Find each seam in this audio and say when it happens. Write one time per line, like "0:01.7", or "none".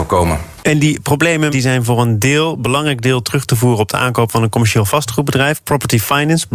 0:01.5